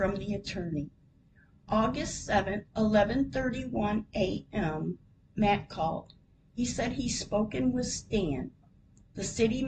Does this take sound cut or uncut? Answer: cut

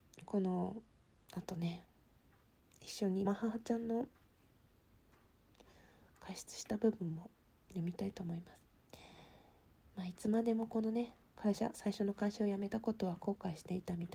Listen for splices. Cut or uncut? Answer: cut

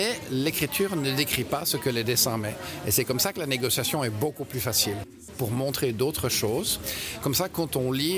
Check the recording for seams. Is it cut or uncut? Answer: cut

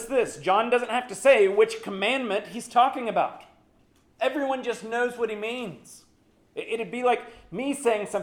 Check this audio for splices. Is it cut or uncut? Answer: uncut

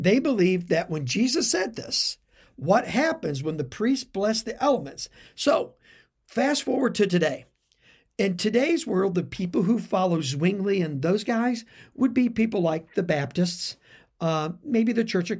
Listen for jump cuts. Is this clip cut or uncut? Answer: cut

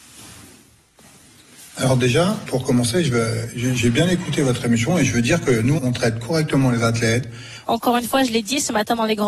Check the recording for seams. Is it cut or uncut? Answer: cut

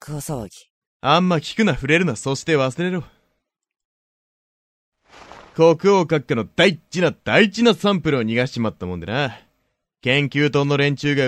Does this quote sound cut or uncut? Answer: uncut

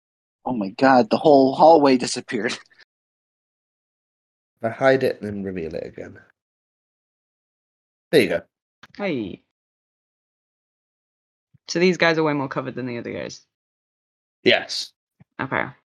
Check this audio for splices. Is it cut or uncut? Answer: uncut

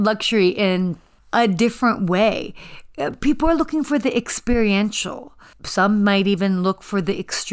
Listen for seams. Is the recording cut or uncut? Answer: uncut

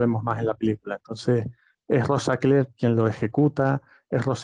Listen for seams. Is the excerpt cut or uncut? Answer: uncut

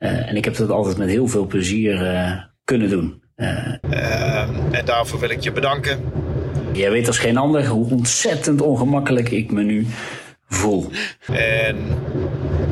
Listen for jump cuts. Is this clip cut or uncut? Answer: cut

